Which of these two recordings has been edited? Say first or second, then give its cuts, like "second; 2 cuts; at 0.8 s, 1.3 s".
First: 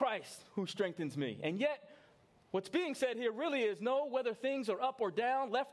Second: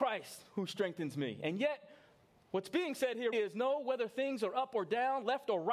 second; 1 cut; at 3.3 s